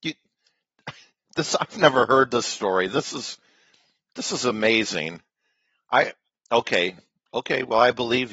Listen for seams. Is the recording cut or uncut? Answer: uncut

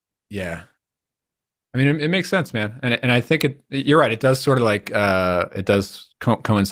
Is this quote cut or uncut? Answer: uncut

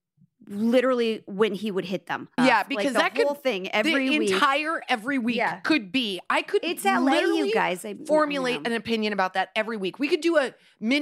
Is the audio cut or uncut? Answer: cut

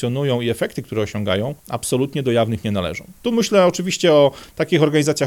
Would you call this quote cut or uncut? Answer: cut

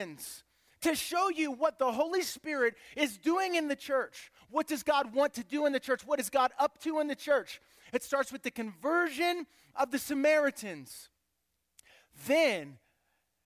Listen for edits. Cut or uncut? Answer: uncut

